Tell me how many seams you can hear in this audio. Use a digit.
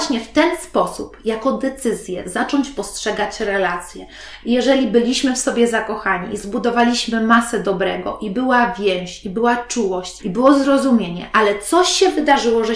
2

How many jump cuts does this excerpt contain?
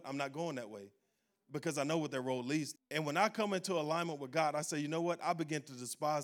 1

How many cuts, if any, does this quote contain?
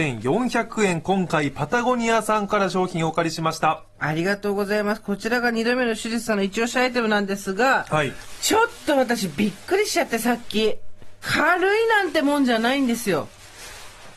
1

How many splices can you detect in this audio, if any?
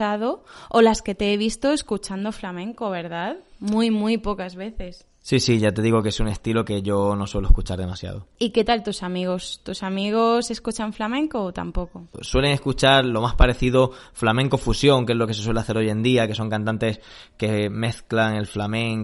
1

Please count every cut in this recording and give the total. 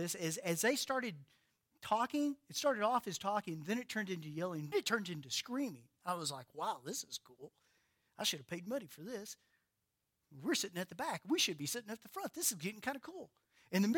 1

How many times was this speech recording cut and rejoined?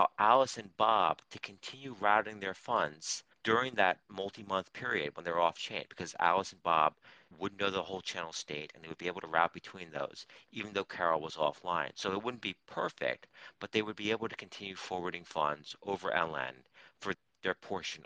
1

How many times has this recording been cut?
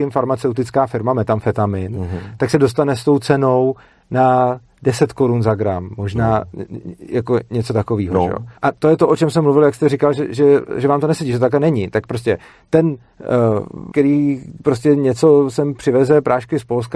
2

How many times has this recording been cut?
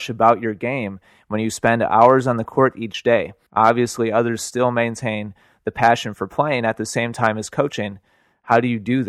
1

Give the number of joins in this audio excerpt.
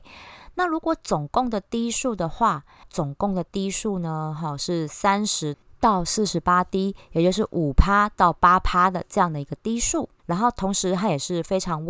2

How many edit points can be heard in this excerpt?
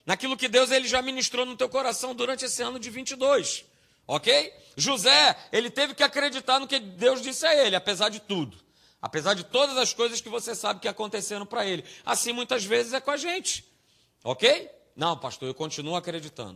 0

